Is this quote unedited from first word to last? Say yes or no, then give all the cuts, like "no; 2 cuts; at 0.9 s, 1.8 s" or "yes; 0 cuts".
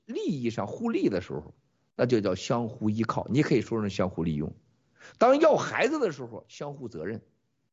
yes; 0 cuts